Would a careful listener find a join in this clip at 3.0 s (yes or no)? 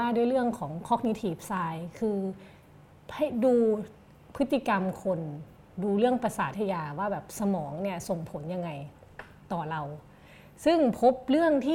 no